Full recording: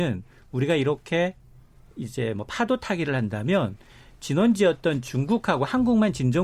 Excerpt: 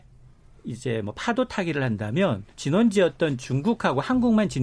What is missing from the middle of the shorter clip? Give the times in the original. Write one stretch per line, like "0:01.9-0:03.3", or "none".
0:03.8-0:04.1